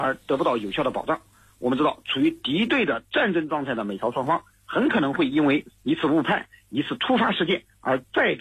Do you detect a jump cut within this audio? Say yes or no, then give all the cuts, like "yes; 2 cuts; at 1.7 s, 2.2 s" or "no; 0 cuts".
no; 0 cuts